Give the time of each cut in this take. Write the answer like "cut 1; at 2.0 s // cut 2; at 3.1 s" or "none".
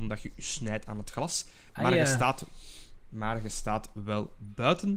none